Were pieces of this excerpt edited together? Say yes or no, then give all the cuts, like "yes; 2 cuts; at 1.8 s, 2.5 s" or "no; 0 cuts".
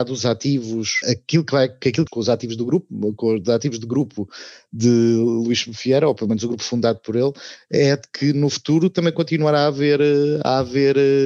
yes; 2 cuts; at 1.0 s, 2.1 s